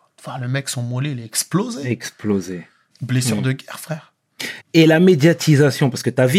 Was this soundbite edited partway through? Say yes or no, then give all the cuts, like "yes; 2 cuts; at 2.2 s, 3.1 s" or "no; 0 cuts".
yes; 2 cuts; at 2.9 s, 4.6 s